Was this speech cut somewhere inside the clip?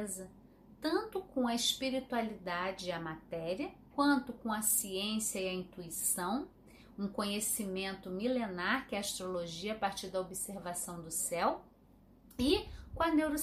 yes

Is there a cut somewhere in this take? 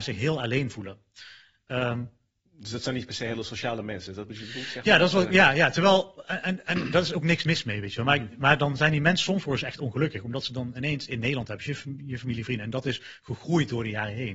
no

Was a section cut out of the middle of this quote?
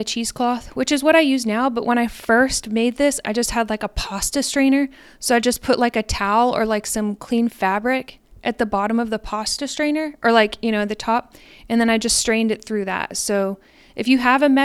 yes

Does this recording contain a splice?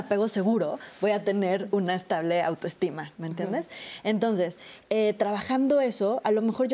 no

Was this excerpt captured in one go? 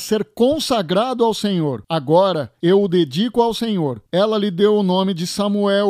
no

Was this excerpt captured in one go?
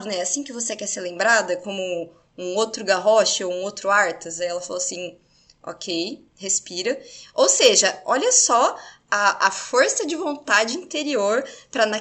yes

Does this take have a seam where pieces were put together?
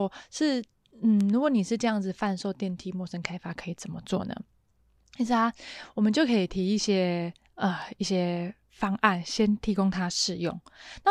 no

